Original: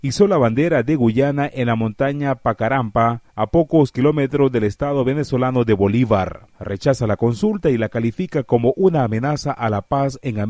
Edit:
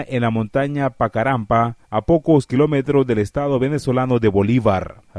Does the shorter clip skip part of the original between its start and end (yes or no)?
no